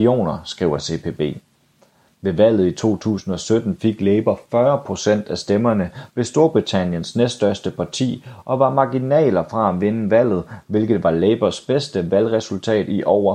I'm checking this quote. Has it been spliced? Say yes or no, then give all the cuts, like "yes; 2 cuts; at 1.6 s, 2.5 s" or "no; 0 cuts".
no; 0 cuts